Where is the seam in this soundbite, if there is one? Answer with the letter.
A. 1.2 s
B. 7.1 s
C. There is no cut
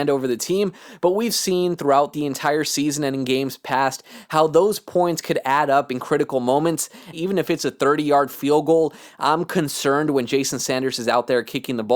B